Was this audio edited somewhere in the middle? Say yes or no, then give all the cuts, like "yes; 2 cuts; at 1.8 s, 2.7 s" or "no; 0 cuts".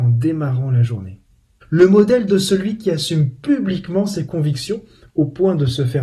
yes; 1 cut; at 1.6 s